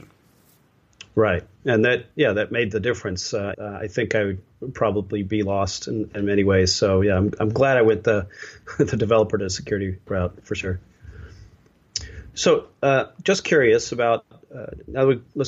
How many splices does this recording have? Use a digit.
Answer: 1